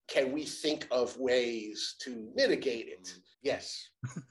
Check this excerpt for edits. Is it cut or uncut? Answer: cut